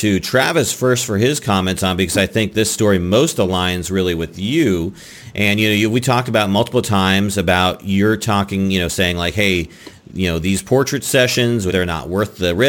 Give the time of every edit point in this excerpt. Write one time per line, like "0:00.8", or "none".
0:11.7